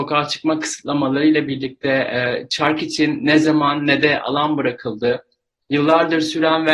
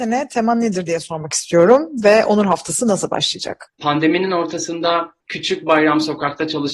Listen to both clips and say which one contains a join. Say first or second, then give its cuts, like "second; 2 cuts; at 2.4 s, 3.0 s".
second; 2 cuts; at 3.7 s, 5.2 s